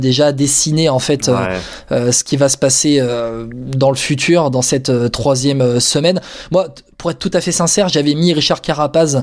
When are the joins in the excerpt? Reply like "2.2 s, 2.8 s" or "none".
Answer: none

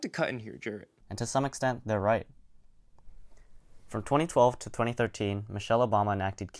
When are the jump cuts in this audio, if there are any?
1.0 s

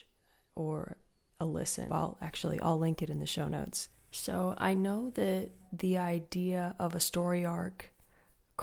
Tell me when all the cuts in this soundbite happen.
1.9 s

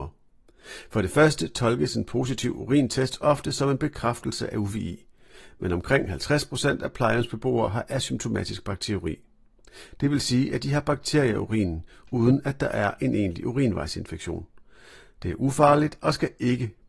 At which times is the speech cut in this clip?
none

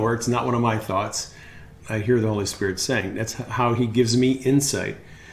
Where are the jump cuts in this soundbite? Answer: 1.8 s

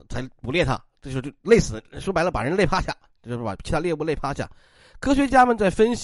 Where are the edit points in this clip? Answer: none

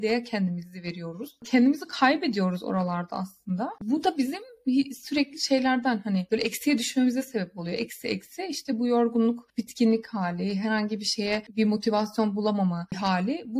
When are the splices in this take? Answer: none

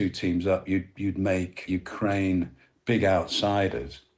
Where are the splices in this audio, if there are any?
none

